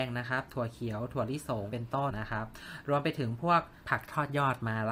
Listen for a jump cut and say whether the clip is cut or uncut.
cut